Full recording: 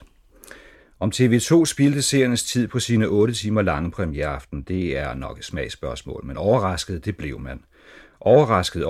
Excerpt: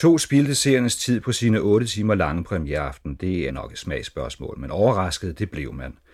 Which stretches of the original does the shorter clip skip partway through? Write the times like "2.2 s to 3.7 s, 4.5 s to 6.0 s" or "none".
4.9 s to 5.1 s